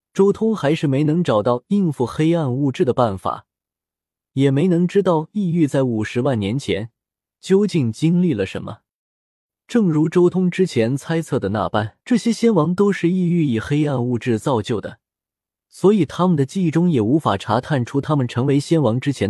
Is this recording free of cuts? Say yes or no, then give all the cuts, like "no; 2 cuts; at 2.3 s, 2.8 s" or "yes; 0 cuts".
no; 2 cuts; at 12.0 s, 15.5 s